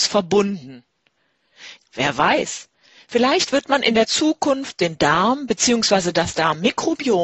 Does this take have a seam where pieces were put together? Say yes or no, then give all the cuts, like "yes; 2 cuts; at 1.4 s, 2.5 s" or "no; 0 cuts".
yes; 1 cut; at 1.8 s